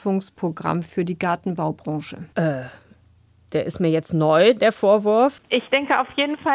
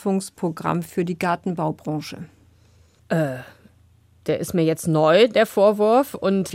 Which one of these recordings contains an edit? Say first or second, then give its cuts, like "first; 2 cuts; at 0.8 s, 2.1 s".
first; 2 cuts; at 2.3 s, 5.4 s